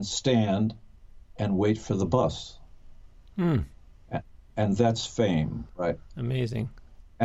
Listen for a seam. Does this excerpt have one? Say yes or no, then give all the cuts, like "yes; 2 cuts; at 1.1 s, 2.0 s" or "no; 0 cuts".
yes; 1 cut; at 5.7 s